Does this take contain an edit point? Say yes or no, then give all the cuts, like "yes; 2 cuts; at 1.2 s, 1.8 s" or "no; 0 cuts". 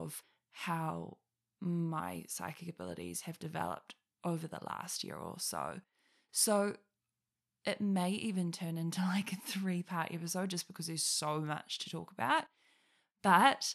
no; 0 cuts